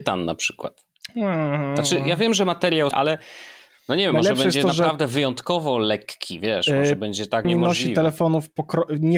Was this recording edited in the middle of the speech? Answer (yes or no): yes